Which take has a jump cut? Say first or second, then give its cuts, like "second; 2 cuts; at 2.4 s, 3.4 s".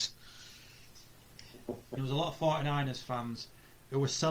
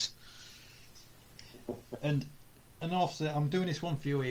first; 1 cut; at 2.0 s